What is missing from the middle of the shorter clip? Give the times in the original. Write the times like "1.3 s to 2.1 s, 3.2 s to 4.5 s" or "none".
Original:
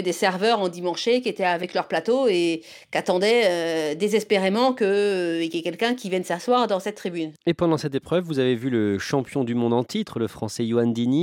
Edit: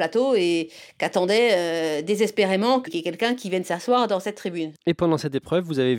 4.8 s to 5.5 s